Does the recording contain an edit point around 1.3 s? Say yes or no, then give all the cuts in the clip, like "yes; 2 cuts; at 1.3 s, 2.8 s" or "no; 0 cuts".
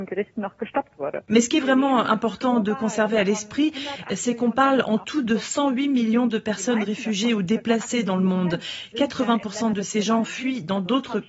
yes; 1 cut; at 1.3 s